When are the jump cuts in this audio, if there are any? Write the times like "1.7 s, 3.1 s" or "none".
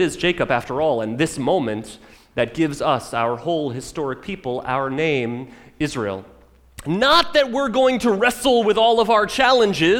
none